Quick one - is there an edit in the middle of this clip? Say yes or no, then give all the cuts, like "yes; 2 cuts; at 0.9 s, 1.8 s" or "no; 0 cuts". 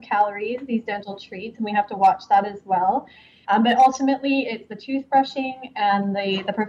yes; 1 cut; at 3.4 s